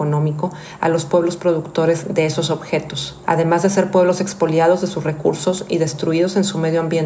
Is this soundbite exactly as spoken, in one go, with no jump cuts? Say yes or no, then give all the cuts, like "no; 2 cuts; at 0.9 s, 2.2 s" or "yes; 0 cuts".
no; 1 cut; at 3.2 s